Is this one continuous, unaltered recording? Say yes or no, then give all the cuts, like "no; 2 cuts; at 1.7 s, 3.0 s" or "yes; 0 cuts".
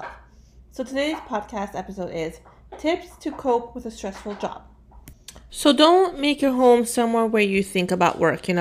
no; 1 cut; at 5.5 s